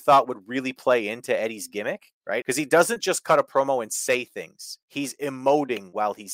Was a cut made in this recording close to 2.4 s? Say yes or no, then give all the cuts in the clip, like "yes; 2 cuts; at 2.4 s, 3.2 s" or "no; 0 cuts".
yes; 2 cuts; at 2.4 s, 4.8 s